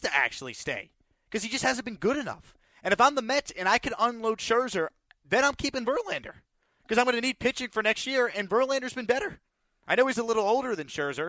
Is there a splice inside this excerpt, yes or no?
no